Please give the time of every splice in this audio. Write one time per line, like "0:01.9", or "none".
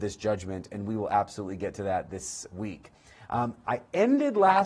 none